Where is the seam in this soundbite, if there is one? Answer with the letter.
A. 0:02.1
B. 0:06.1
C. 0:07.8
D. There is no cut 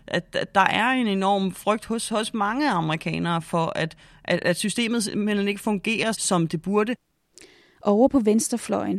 B